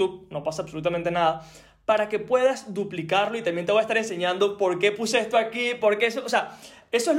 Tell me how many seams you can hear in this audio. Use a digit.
0